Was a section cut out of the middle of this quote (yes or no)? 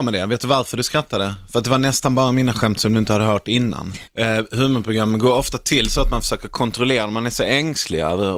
yes